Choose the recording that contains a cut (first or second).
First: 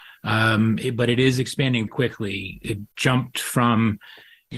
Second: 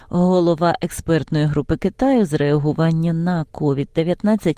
first